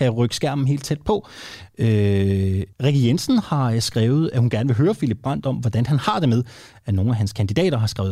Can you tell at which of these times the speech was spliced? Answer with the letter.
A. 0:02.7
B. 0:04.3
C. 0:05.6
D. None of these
A